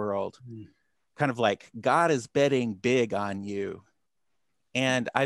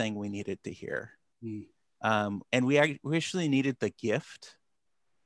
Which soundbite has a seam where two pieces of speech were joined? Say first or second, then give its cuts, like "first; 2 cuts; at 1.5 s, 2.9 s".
second; 2 cuts; at 2.4 s, 3.8 s